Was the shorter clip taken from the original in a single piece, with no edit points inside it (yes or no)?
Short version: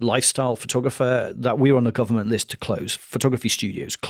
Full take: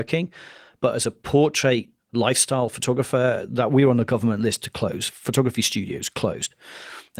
yes